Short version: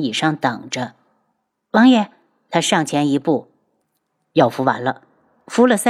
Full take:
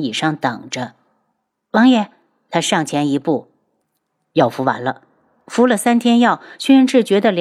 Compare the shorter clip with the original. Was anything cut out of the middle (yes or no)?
no